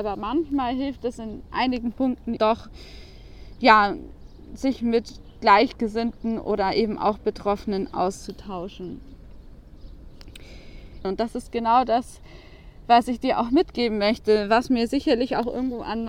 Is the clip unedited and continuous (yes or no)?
no